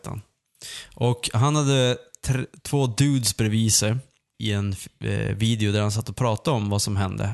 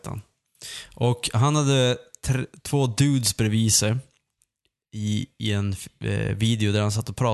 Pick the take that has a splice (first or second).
first